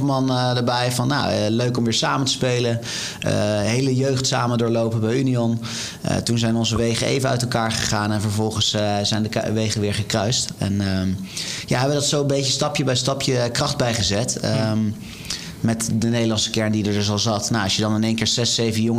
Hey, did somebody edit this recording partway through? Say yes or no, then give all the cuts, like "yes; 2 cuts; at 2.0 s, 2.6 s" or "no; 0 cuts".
no; 0 cuts